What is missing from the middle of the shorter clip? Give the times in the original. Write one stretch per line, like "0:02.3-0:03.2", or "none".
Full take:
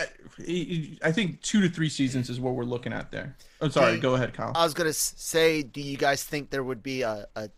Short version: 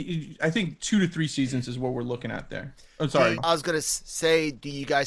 0:04.0-0:04.5

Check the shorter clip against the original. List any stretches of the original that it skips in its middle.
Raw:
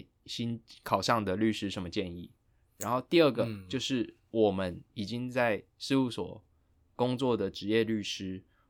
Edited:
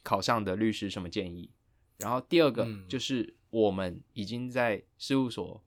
none

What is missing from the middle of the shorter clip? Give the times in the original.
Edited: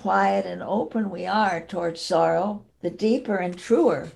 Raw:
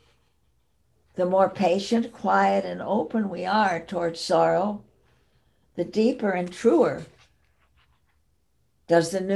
0:04.9-0:05.6

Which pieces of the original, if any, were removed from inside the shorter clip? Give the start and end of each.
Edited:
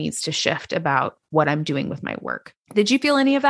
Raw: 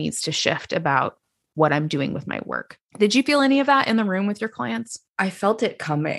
0:01.3-0:01.5

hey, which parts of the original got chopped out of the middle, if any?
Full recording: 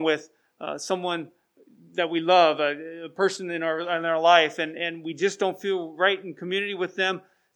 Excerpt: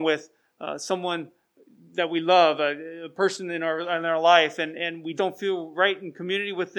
0:05.2-0:05.4

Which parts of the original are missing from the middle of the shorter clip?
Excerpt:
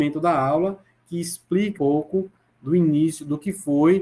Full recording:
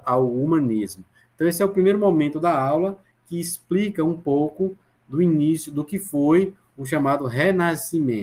0:04.0-0:04.2

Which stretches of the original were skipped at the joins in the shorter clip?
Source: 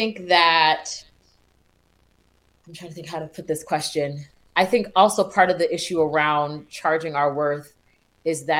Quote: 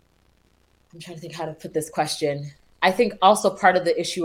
none

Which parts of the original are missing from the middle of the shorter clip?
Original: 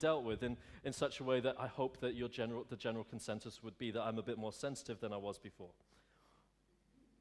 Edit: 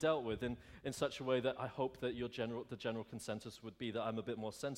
none

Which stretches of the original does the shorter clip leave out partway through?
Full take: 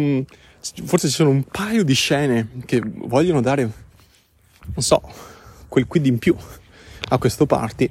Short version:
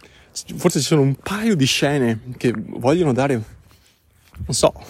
none

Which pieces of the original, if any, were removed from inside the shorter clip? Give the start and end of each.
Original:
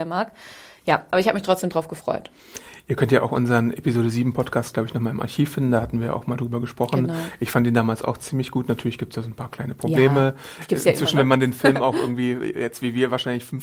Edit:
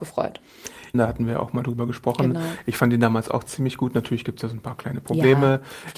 0:02.8-0:05.7

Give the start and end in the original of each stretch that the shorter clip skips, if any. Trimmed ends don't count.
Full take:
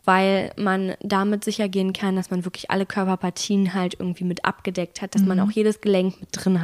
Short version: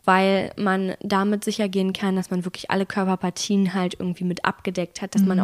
none

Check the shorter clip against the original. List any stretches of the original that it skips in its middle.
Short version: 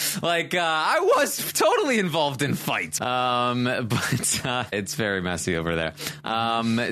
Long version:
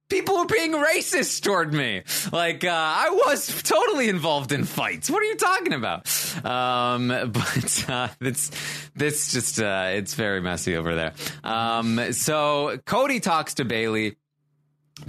0:05.1-0:06.4
0:08.2-0:09.9

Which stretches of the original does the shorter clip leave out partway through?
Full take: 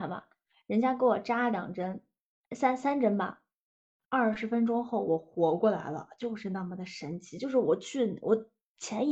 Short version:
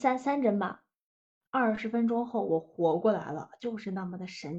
none

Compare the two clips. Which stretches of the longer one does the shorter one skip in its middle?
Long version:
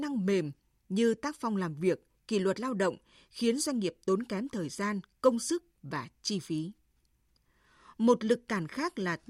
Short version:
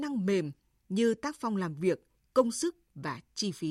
0:02.2-0:05.1

